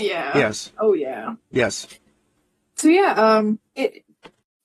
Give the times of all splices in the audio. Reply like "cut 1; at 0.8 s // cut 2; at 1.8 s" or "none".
cut 1; at 3.7 s